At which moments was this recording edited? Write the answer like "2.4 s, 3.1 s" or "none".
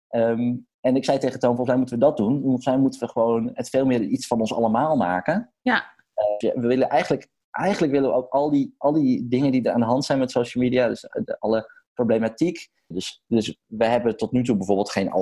6.4 s, 12.9 s